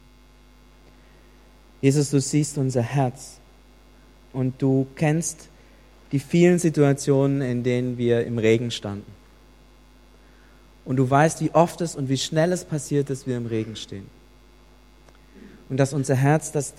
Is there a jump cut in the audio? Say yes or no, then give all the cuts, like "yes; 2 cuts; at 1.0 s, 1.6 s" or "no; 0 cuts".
no; 0 cuts